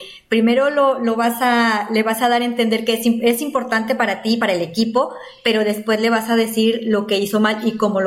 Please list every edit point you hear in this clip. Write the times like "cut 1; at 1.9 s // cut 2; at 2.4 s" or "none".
none